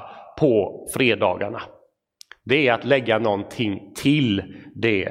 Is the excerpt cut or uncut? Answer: uncut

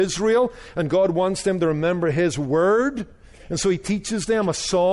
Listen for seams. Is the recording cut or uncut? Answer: uncut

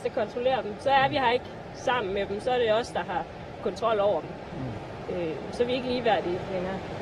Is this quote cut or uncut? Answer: uncut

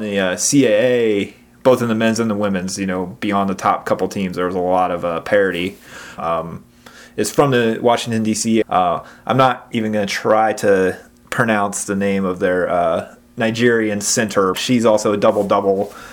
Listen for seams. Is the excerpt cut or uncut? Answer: cut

